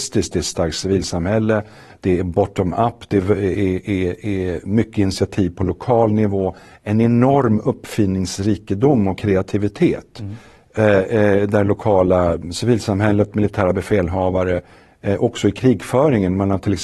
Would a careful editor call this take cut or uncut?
uncut